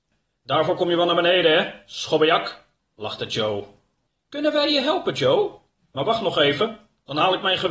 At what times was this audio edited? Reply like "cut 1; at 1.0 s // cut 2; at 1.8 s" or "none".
cut 1; at 4.2 s // cut 2; at 5.8 s